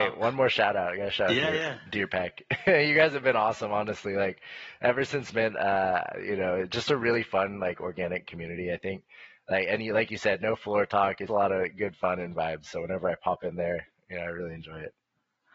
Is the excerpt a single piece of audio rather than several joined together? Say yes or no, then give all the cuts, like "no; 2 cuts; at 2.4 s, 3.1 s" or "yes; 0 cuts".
no; 1 cut; at 11.3 s